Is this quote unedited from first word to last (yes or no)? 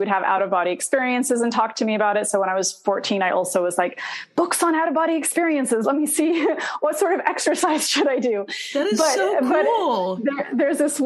yes